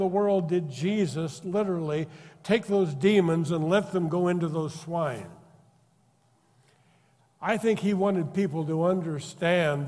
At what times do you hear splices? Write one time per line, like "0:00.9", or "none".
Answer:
none

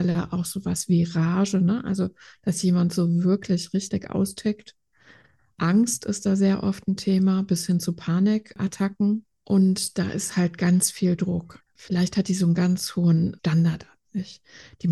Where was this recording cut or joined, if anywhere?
0:09.3
0:11.6

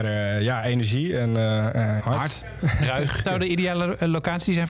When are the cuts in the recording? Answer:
0:02.0
0:03.2

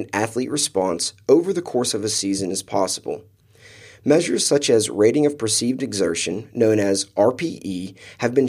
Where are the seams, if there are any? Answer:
none

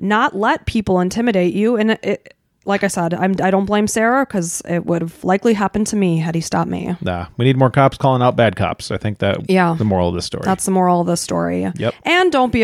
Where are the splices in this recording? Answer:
none

